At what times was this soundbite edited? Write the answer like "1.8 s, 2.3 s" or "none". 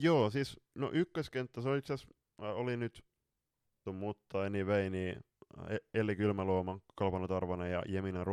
3.9 s